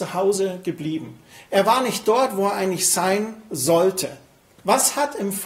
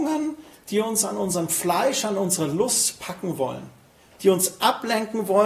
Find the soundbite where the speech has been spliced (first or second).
first